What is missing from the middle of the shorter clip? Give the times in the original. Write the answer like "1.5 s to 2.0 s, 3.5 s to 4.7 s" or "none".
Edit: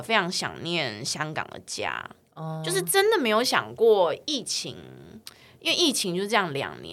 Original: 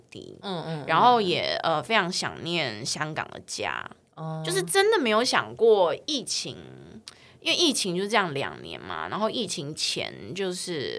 none